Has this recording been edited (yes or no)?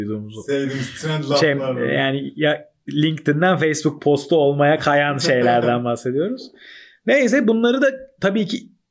no